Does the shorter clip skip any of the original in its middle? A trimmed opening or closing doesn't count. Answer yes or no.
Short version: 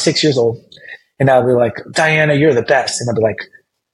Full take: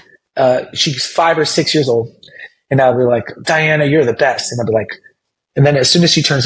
no